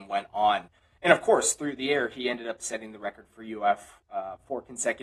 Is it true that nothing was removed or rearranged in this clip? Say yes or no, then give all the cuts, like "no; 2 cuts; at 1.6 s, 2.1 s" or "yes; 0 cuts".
yes; 0 cuts